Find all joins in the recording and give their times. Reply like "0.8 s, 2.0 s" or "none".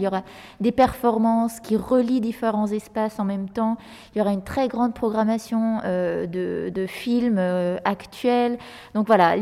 none